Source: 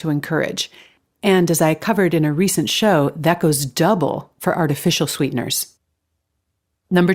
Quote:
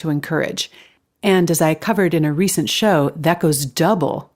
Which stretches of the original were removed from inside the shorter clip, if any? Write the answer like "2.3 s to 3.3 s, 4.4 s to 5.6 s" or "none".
none

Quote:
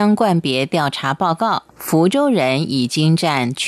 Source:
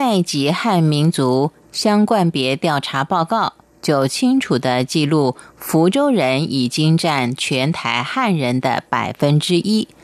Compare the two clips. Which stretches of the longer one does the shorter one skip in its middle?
3.6 s to 5.5 s

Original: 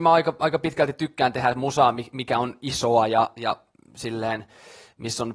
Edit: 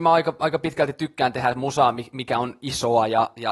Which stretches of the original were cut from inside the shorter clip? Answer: none

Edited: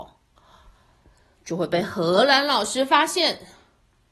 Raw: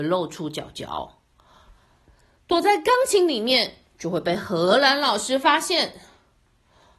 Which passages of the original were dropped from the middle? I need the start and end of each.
2.4 s to 3.9 s

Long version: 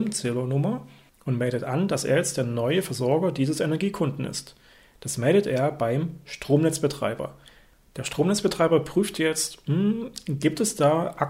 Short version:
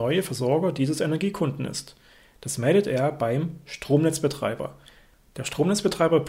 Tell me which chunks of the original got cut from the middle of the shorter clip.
none

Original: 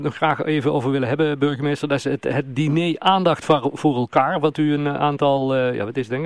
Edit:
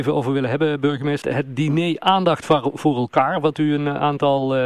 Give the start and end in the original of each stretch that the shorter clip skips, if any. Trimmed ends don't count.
1.8 s to 2.2 s

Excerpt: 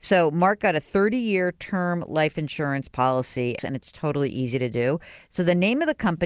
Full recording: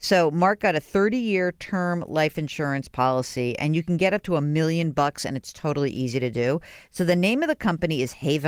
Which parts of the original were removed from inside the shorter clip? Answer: 3.6 s to 5.2 s

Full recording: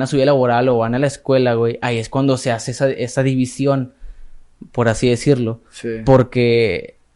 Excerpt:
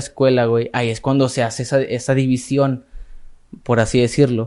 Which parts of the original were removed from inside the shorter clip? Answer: none

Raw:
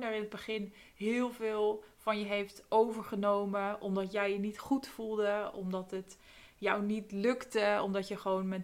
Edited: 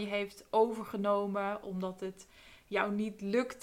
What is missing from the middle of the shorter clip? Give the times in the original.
3.8 s to 5.5 s

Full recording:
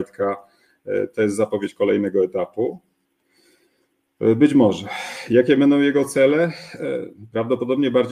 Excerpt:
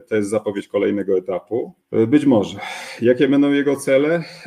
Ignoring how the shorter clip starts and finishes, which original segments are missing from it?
2.9 s to 4.1 s

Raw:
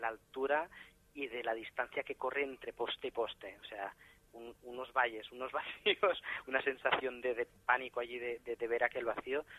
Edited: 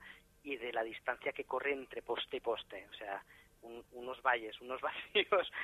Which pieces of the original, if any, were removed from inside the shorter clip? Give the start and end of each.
none

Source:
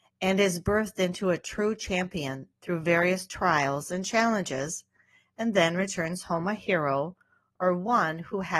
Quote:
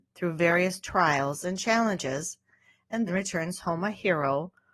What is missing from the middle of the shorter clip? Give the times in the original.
5.5 s to 5.7 s

